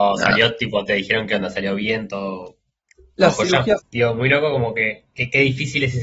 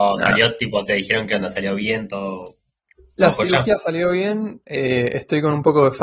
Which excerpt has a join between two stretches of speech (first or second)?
first